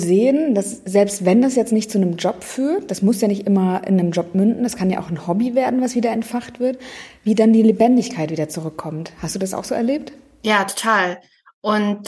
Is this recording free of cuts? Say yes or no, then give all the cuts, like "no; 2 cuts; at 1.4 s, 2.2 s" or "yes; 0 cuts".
yes; 0 cuts